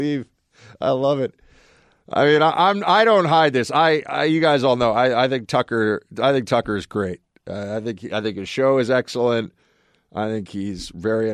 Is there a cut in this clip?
no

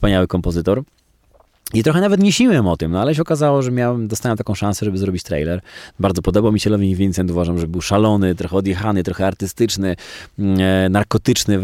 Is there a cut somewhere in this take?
yes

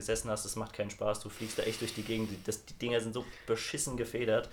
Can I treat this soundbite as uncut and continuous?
yes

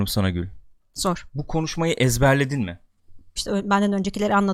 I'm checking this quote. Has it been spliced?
yes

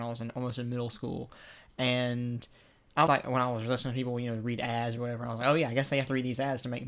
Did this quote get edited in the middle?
yes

